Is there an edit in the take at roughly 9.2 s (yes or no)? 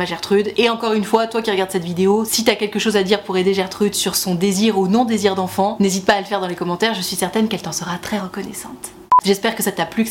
yes